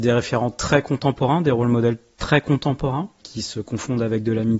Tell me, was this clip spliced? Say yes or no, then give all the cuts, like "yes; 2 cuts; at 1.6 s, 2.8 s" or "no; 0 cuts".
no; 0 cuts